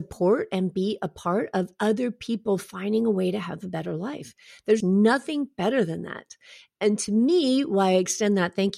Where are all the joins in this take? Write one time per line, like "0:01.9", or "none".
0:04.8